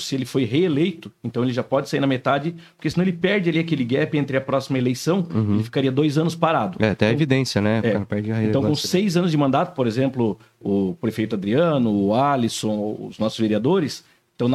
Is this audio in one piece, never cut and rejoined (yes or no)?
yes